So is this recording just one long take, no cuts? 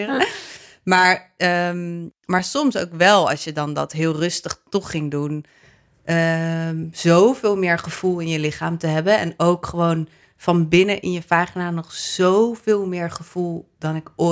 yes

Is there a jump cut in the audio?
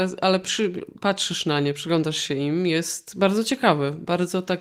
no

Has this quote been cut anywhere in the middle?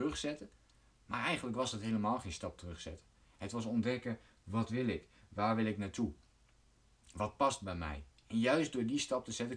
no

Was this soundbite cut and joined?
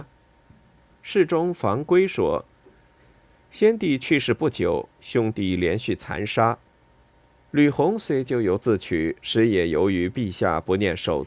no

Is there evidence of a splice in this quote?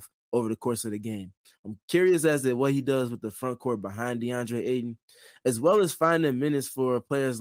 no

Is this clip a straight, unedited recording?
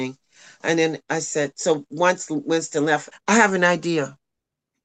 no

